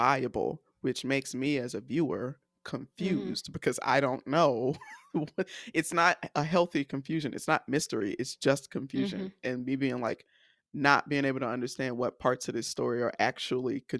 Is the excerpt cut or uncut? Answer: uncut